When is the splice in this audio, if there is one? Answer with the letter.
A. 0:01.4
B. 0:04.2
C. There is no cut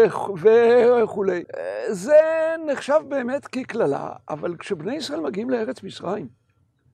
A